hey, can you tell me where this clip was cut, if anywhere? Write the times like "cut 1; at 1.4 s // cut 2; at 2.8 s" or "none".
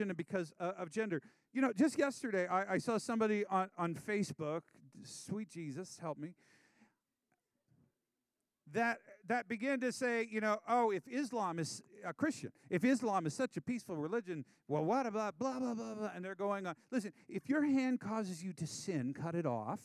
none